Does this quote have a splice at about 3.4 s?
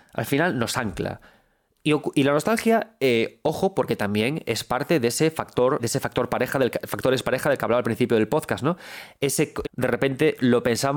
no; 2 cuts; at 5.8 s, 9.6 s

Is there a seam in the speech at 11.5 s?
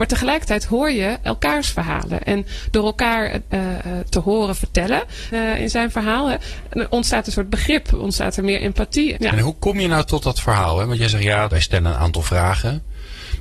yes; 3 cuts; at 5.3 s, 9.1 s, 11.5 s

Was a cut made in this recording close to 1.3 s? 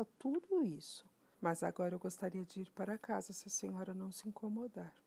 yes; 1 cut; at 1.3 s

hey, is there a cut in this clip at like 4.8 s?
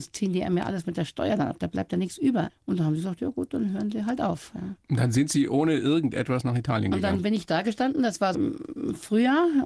no; 2 cuts; at 2.5 s, 8.3 s

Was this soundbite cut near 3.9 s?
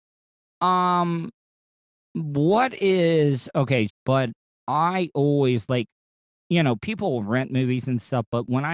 yes; 1 cut; at 3.9 s

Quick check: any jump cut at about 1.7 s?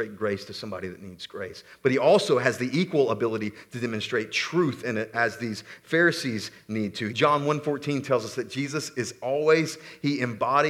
no; 2 cuts; at 5.1 s, 7.1 s

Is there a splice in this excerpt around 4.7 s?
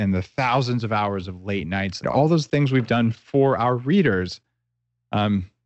no; 1 cut; at 2.0 s

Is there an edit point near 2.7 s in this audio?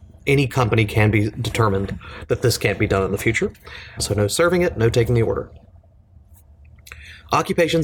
no; 1 cut; at 4.0 s

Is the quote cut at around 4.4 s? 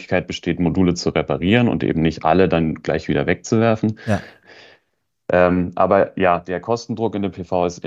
yes; 1 cut; at 4.4 s

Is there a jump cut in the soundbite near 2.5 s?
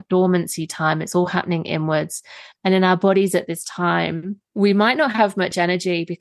no; 1 cut; at 4.5 s

